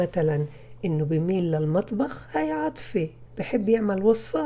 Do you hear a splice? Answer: yes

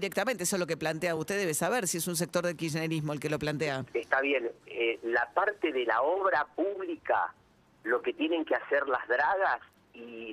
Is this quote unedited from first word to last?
yes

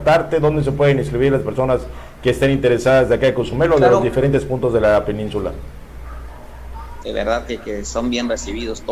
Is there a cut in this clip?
yes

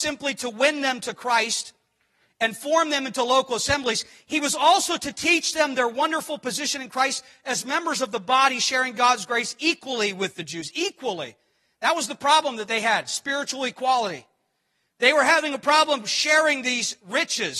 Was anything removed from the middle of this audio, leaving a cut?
no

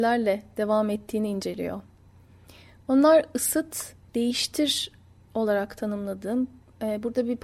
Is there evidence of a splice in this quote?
yes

